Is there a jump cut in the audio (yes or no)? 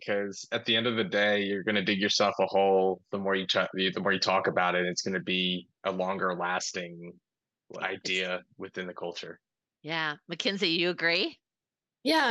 yes